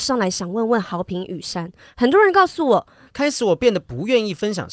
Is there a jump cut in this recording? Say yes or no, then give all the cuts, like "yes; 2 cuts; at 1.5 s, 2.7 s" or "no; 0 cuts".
yes; 1 cut; at 3.1 s